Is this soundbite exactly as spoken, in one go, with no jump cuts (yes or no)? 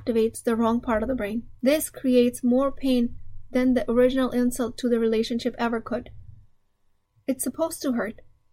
no